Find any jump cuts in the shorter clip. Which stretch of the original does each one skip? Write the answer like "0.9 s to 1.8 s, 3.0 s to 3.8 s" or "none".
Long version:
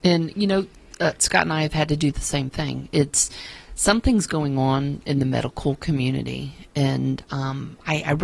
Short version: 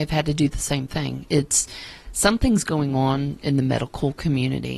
none